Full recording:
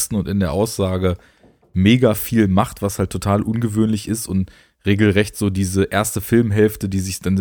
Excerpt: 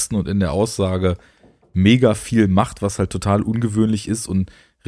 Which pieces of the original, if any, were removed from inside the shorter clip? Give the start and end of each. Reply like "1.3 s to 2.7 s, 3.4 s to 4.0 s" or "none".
none